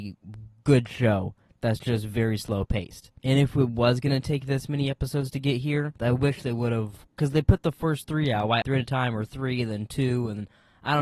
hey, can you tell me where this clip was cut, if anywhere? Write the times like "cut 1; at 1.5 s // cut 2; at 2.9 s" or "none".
cut 1; at 3.2 s // cut 2; at 8.6 s